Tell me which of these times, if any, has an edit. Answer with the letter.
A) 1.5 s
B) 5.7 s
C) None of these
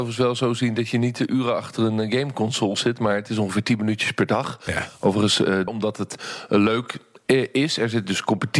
B